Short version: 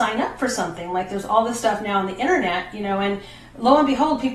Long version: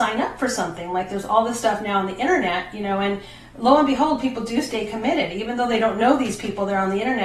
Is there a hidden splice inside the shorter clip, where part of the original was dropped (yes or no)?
no